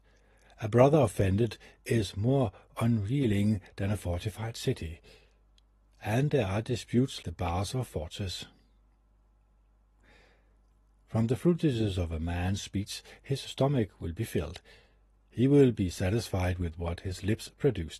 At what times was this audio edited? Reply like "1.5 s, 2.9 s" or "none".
7.2 s